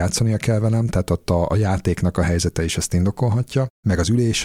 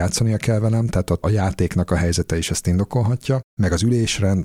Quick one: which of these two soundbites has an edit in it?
second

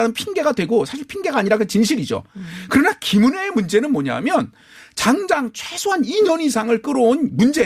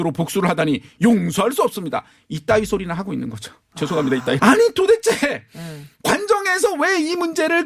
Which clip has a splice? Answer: second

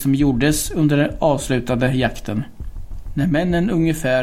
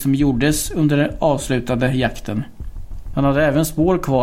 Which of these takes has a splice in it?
second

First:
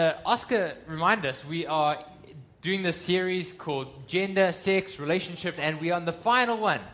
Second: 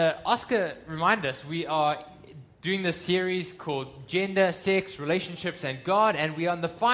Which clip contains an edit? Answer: first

